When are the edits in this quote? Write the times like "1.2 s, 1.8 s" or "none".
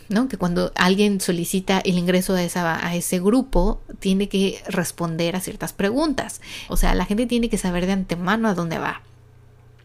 6.7 s